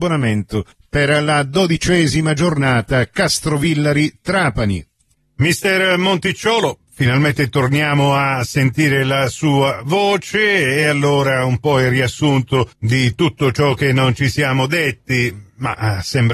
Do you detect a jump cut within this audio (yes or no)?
no